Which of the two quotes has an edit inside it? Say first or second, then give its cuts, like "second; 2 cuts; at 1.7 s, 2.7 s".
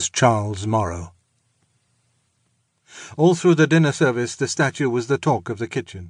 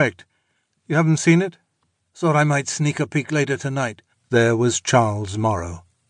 second; 2 cuts; at 2.1 s, 4.1 s